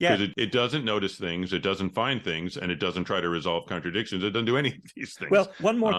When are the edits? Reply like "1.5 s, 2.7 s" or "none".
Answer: 2.5 s